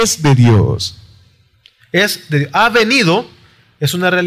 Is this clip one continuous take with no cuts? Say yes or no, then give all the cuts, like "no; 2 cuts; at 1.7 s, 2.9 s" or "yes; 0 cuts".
yes; 0 cuts